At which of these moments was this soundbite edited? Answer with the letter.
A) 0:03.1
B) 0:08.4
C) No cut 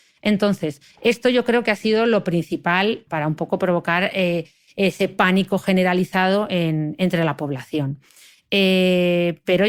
A